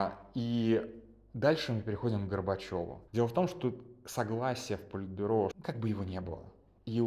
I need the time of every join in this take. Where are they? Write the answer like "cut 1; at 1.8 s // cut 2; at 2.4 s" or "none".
cut 1; at 3.1 s // cut 2; at 5.5 s